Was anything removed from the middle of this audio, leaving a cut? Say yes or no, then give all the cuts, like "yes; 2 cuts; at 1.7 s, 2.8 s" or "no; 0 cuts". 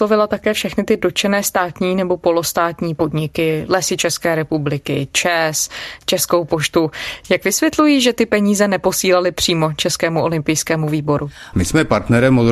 yes; 1 cut; at 11.5 s